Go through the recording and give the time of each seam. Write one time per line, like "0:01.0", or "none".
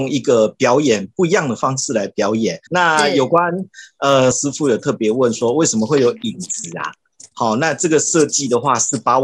0:02.7
0:04.3

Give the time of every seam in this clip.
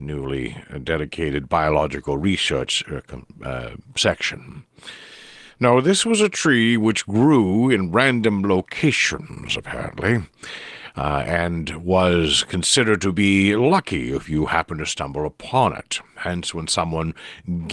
none

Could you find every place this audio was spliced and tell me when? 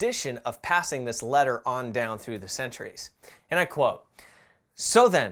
none

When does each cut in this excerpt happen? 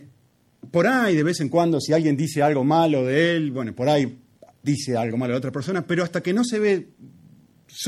none

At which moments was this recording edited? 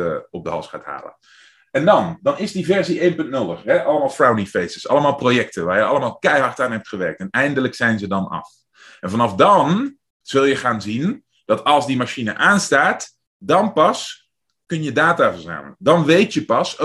none

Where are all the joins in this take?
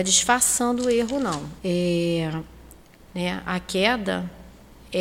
0:01.6
0:03.1

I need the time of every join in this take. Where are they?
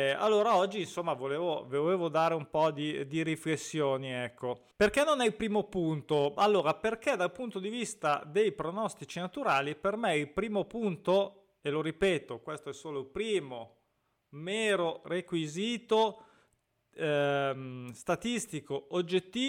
0:04.7

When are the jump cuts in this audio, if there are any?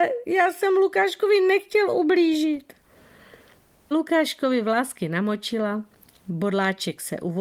0:03.9

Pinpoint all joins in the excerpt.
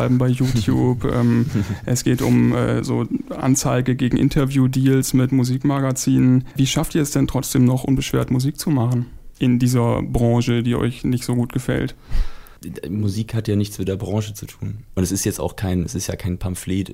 0:14.9

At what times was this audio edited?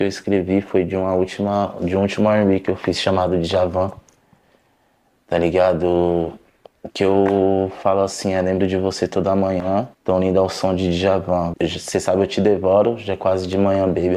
0:09.9
0:11.5

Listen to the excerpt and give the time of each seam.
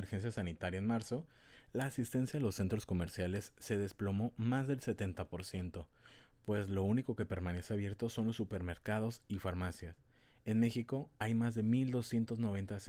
none

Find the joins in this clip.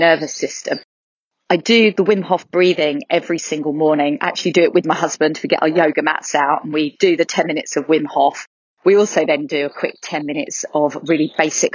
none

